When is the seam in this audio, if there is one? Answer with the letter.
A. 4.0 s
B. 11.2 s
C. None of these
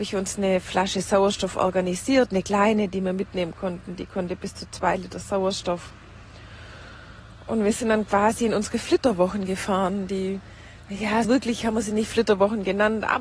B